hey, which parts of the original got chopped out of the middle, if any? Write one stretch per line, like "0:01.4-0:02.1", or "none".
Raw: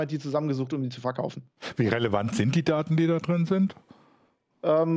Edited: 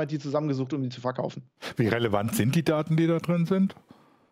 none